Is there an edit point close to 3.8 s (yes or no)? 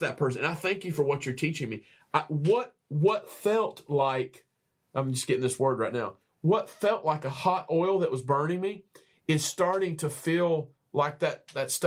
no